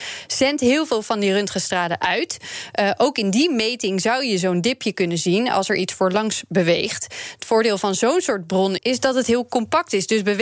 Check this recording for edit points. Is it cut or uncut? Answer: cut